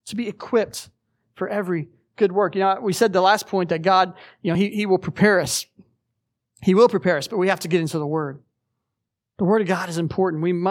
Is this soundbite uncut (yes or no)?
yes